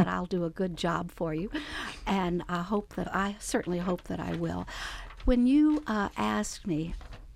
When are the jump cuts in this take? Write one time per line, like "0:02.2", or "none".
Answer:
0:03.0